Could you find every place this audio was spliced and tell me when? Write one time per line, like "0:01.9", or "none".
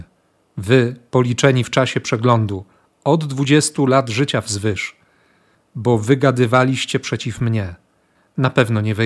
none